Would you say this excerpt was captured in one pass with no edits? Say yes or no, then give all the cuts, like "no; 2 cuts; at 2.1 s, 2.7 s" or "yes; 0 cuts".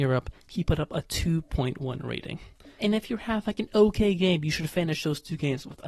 no; 1 cut; at 2.8 s